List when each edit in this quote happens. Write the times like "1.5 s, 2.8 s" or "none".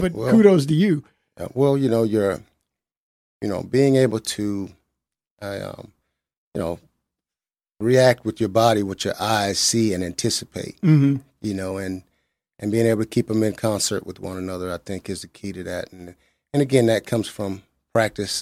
none